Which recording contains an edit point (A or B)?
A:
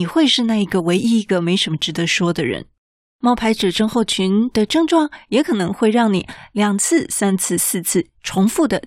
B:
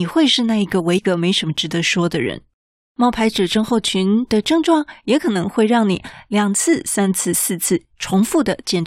B